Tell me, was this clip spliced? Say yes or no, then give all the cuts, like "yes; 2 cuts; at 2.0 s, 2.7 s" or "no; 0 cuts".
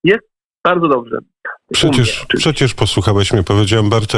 yes; 1 cut; at 1.6 s